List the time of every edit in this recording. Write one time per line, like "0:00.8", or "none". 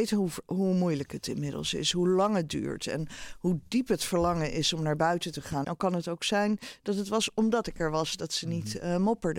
0:05.6